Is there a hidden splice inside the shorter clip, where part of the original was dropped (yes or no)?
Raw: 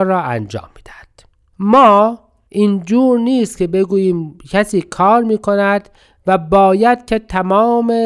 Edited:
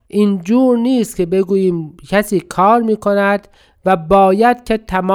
no